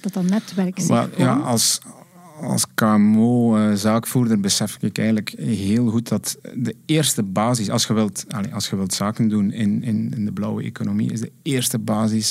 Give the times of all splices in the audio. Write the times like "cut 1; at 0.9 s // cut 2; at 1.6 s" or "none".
none